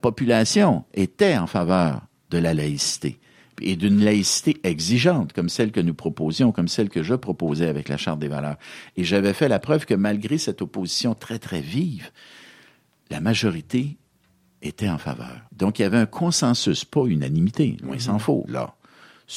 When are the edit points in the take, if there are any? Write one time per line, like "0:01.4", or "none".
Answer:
0:15.5
0:18.5